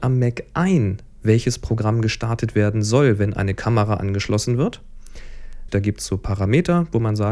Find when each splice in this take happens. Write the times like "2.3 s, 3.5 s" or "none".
5.7 s